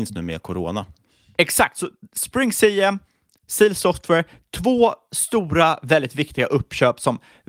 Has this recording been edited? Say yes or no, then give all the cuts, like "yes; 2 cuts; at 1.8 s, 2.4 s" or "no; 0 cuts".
no; 0 cuts